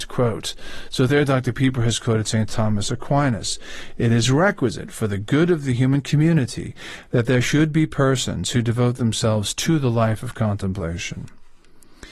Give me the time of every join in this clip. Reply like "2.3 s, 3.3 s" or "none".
none